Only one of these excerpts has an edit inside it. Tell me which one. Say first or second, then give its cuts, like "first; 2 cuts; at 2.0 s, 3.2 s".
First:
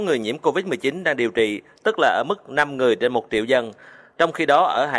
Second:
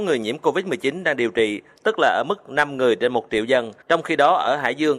second; 1 cut; at 3.8 s